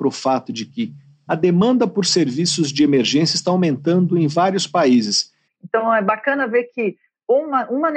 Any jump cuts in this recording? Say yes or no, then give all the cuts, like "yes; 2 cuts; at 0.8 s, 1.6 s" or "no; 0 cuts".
yes; 2 cuts; at 1.3 s, 5.5 s